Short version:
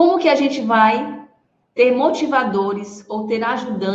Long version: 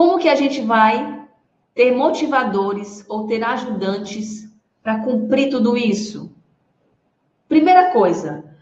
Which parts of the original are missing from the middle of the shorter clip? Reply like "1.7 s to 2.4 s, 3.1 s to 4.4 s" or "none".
none